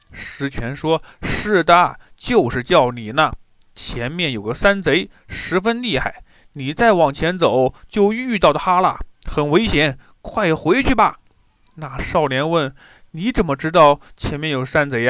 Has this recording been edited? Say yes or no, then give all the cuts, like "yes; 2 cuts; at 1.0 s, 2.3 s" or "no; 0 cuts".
no; 0 cuts